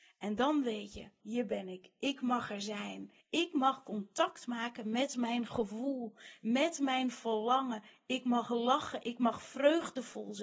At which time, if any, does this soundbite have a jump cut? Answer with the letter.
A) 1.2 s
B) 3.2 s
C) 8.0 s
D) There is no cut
A